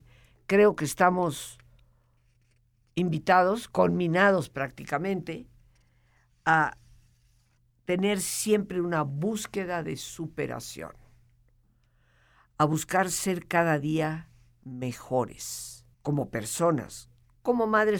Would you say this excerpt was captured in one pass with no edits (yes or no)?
no